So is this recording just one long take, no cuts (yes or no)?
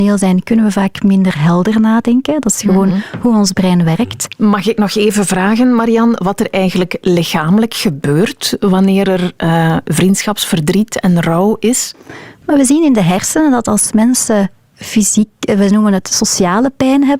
yes